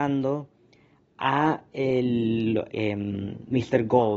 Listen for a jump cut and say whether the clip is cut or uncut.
cut